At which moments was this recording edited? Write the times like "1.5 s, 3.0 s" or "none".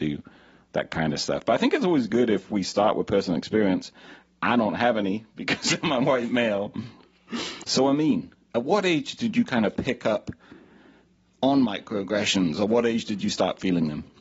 7.6 s